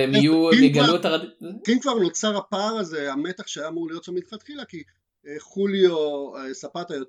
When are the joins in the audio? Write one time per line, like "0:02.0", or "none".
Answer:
0:01.7